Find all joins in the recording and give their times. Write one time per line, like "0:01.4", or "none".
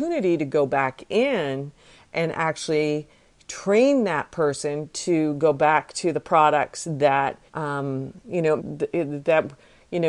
0:07.5
0:08.6